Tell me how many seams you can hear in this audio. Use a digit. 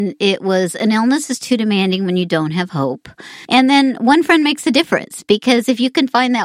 1